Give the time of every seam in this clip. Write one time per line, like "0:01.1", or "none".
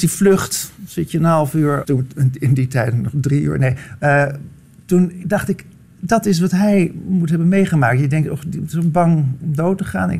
0:01.8